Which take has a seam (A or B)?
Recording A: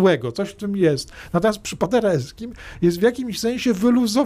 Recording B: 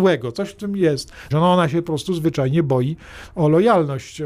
B